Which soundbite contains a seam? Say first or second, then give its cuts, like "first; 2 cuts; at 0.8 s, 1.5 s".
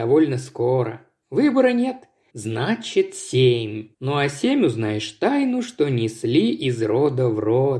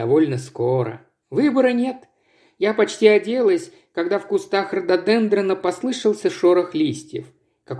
first; 2 cuts; at 2.3 s, 3.9 s